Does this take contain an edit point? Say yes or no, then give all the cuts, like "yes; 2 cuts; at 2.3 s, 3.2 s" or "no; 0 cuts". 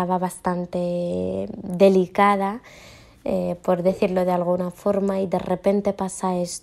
no; 0 cuts